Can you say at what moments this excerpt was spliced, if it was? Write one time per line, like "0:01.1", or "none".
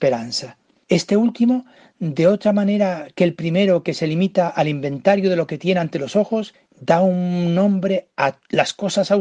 0:06.7